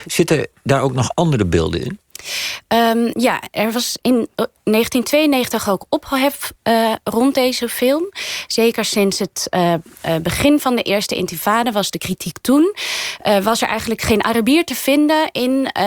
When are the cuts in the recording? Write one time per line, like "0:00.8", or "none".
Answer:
0:08.5